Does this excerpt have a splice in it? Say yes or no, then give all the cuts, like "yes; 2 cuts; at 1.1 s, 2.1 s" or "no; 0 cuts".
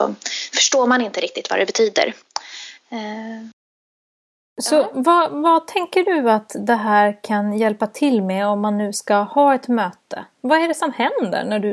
no; 0 cuts